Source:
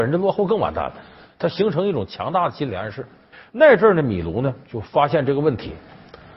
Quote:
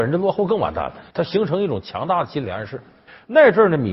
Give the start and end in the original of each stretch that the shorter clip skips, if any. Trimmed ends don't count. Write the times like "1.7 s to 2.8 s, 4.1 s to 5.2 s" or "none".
1.1 s to 1.3 s